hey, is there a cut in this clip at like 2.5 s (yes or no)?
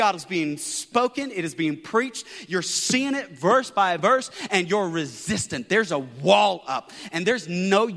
no